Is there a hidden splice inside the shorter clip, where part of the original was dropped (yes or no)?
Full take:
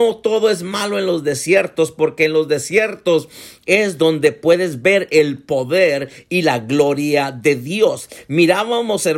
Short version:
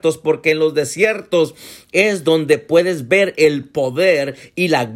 no